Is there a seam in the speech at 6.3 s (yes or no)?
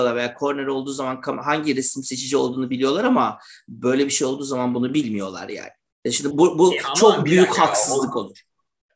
yes